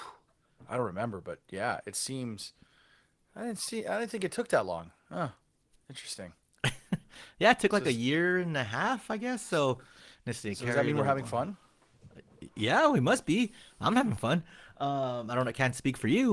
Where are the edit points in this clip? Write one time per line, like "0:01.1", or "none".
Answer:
none

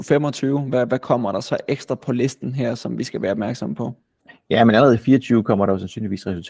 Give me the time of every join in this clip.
none

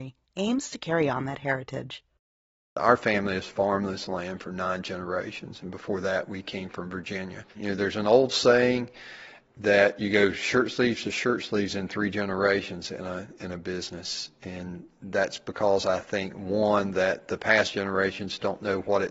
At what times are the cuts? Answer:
0:07.5

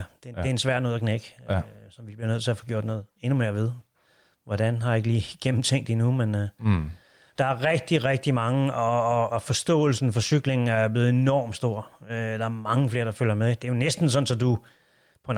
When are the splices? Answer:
0:07.3

